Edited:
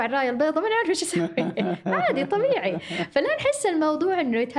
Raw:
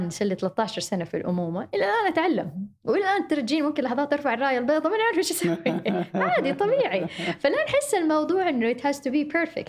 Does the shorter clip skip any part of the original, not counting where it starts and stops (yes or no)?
no